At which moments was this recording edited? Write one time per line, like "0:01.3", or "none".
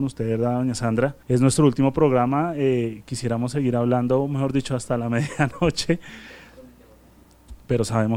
0:01.2